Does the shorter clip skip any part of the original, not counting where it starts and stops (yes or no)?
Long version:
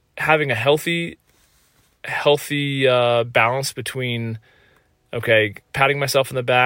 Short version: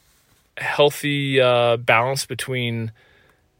no